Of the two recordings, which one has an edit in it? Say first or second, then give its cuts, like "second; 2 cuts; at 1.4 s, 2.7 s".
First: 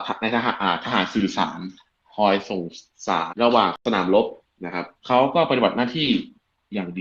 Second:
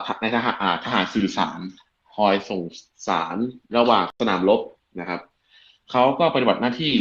first; 2 cuts; at 3.3 s, 5.0 s